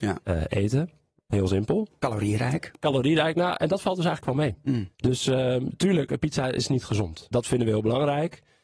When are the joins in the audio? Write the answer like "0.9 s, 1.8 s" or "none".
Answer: 4.9 s, 7.3 s